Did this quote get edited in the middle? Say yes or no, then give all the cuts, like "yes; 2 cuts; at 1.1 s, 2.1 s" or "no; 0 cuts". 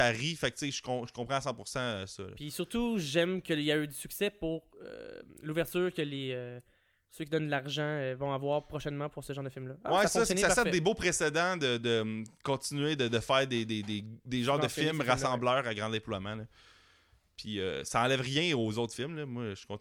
no; 0 cuts